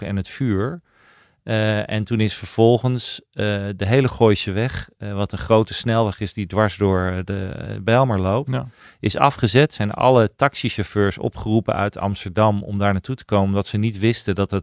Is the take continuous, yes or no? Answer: yes